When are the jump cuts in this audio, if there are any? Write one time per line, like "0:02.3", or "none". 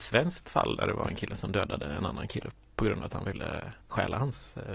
0:03.8